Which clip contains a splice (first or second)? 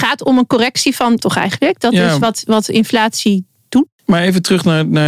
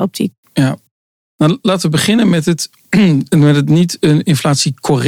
first